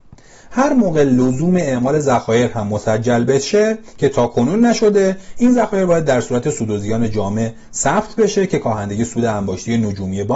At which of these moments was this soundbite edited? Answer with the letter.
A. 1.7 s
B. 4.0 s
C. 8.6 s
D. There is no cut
D